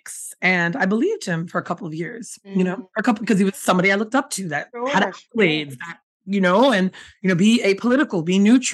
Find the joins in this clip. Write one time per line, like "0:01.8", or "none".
none